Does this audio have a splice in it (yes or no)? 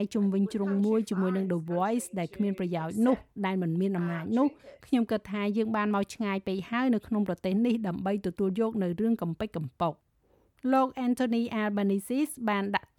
no